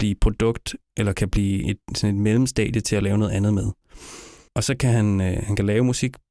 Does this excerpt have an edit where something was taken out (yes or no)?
yes